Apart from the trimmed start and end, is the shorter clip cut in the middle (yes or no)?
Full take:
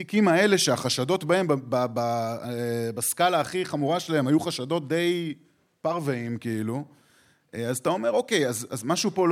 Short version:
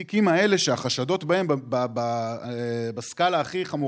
no